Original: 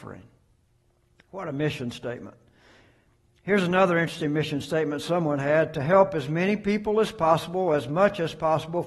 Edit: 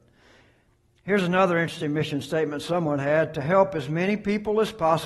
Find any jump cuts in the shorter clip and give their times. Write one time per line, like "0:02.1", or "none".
none